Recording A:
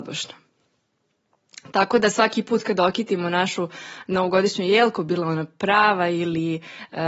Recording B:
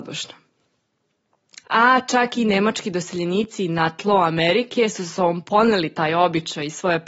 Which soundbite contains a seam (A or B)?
B